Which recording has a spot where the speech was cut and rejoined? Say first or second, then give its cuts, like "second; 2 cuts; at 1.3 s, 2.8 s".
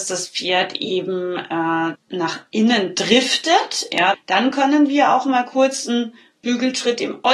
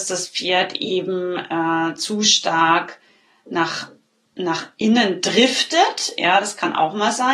first; 2 cuts; at 2.0 s, 4.1 s